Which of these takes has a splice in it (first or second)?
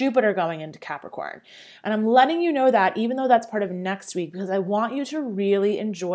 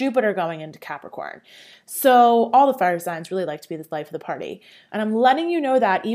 second